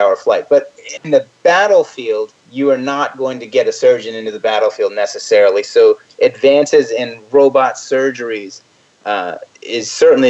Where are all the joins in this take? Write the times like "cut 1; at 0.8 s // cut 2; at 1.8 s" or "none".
cut 1; at 2.4 s